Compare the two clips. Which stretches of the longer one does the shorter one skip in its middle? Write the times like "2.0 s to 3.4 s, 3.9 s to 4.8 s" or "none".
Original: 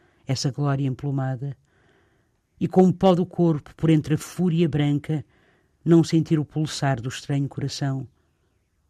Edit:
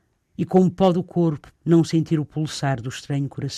3.8 s to 5.7 s

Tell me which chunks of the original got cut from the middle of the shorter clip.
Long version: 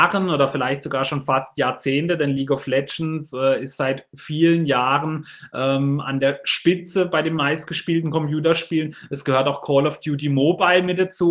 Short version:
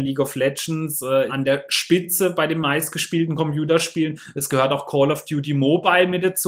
3.6 s to 6.0 s

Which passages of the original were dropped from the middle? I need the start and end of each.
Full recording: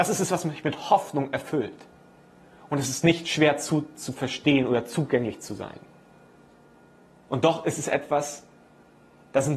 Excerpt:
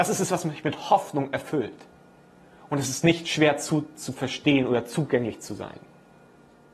none

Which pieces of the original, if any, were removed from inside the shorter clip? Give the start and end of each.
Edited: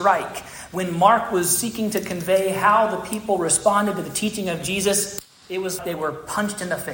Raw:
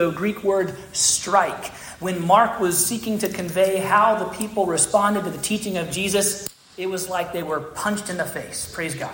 7.1 s to 7.3 s

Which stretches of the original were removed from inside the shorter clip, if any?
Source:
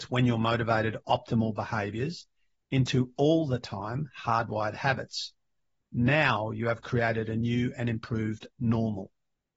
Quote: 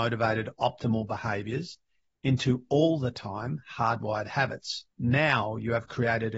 5.4 s to 5.9 s

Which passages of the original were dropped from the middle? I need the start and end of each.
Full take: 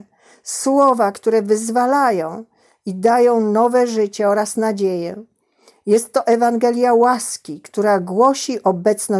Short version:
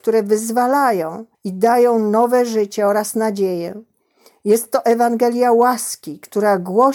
2.5 s to 2.8 s

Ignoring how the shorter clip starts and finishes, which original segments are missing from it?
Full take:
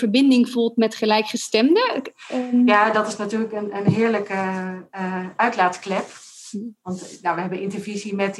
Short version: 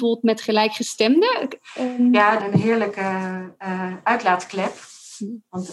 2.9 s to 3.7 s

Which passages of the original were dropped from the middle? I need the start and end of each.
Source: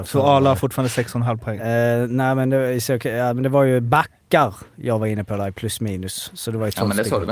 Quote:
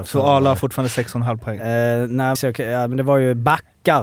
2.3 s to 2.8 s

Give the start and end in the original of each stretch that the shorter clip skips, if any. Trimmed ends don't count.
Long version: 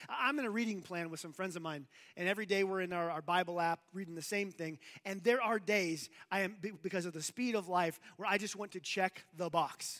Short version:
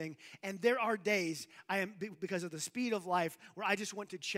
none

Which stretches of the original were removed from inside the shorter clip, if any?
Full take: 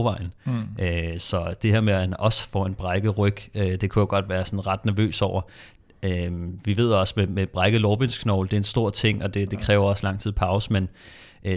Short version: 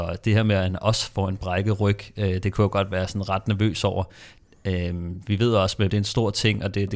7.3 s to 8.5 s

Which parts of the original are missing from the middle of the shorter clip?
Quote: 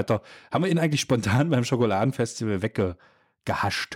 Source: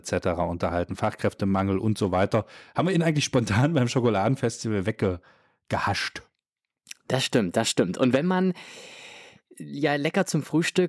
none

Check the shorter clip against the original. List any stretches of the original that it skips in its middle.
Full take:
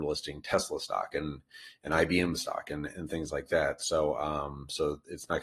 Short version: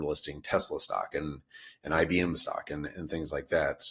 none

